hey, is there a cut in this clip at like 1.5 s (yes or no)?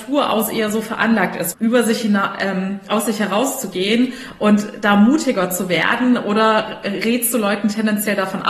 yes